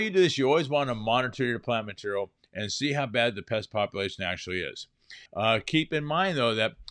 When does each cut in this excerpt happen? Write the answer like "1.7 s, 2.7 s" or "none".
5.3 s